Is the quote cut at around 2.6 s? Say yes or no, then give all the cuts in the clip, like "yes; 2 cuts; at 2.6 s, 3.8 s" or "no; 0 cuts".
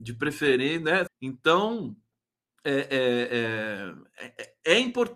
no; 1 cut; at 1.1 s